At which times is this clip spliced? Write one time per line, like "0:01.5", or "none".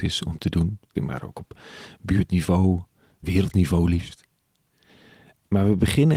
0:01.0
0:03.2